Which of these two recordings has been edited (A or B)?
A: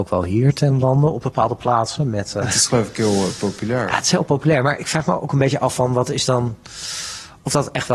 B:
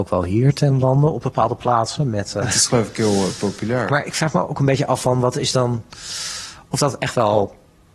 B